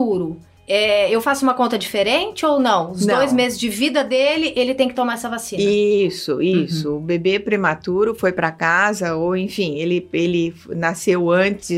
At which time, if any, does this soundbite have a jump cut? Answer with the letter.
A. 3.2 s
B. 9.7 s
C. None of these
C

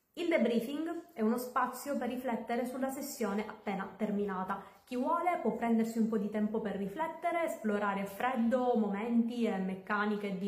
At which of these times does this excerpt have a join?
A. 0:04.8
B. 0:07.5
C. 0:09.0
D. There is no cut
D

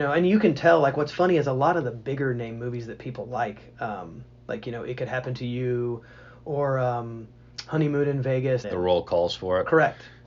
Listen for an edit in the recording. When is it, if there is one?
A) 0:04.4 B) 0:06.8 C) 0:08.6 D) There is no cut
C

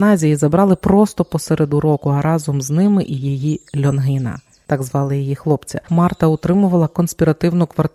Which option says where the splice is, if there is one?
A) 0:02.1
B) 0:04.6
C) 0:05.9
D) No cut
C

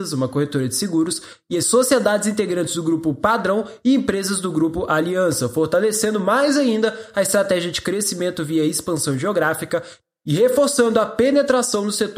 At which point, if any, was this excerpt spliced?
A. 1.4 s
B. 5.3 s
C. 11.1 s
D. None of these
D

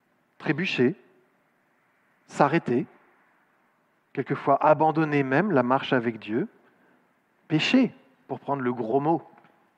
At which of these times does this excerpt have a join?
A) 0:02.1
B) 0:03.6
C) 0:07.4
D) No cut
D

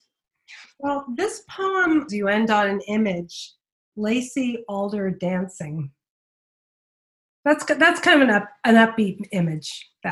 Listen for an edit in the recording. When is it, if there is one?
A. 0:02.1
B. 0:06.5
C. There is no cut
A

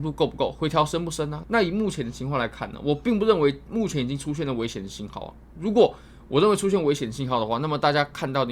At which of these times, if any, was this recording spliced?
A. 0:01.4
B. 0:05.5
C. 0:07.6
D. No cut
A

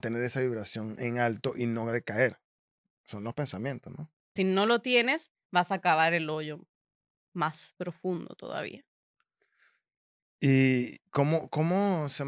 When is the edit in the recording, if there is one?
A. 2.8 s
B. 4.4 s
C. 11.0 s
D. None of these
B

